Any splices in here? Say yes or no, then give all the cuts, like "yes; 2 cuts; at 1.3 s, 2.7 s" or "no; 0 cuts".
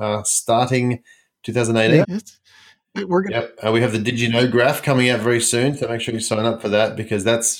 yes; 1 cut; at 2.0 s